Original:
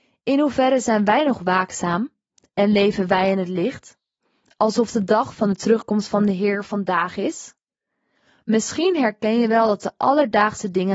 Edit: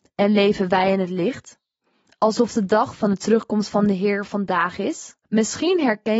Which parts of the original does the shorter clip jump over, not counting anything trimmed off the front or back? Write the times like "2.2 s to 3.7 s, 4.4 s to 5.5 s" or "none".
7.6 s to 8.4 s